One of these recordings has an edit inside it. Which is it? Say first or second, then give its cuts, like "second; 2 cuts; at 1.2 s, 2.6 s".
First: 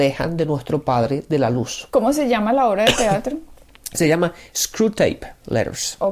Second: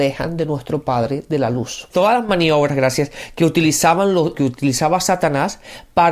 second; 2 cuts; at 1.9 s, 4.3 s